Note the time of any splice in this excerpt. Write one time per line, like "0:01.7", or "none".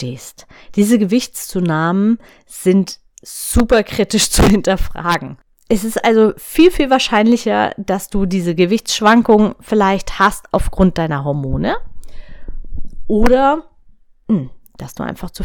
none